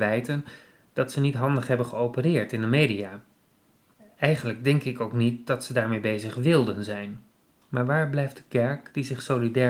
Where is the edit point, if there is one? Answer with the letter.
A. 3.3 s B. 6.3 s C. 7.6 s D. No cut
C